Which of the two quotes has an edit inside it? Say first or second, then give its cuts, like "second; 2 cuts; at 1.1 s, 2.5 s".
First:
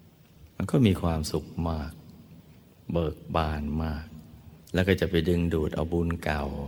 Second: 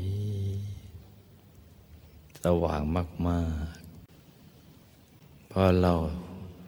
first; 1 cut; at 4.6 s